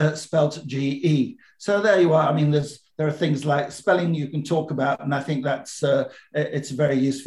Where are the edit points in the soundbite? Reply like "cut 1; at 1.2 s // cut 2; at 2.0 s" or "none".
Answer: none